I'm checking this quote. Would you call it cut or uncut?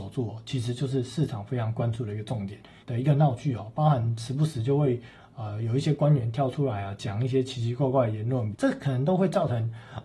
cut